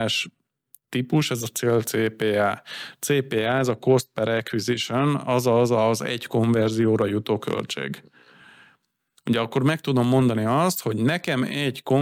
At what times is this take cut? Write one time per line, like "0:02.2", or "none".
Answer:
none